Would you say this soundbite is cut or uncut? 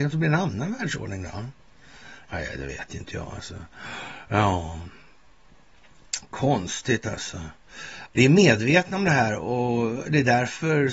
cut